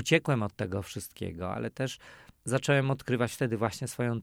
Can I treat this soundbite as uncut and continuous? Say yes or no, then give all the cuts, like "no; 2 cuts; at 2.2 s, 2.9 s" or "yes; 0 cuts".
no; 1 cut; at 2.4 s